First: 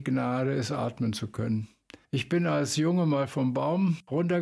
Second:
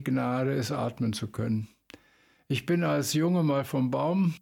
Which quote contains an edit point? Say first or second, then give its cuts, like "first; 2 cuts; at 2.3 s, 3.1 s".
first; 1 cut; at 2.1 s